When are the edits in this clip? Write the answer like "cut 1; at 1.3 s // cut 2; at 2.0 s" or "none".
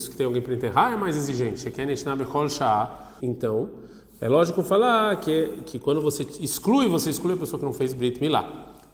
cut 1; at 3.2 s